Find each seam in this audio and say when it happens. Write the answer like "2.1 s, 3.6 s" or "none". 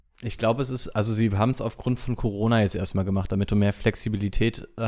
none